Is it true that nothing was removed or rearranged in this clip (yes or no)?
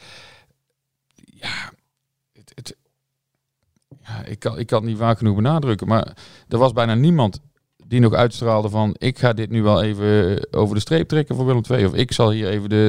yes